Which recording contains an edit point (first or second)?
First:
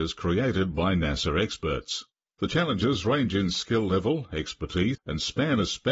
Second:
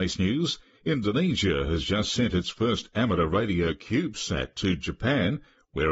first